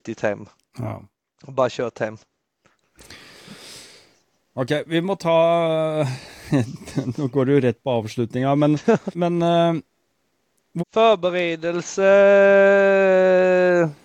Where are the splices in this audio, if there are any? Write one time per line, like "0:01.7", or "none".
0:09.1
0:10.8